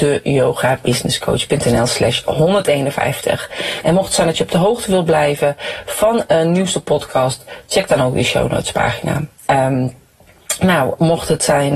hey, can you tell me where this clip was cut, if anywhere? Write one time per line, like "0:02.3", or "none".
0:03.8
0:09.5